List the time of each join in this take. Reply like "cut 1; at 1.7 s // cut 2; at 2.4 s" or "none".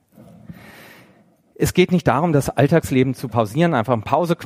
none